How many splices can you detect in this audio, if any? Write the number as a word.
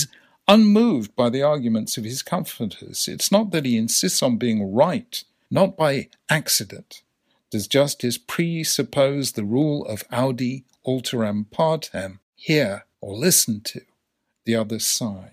two